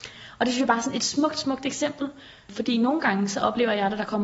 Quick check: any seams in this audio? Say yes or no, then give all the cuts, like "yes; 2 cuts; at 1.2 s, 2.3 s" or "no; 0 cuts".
no; 0 cuts